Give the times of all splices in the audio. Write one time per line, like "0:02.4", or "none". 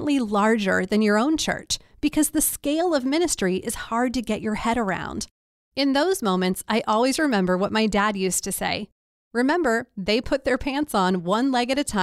none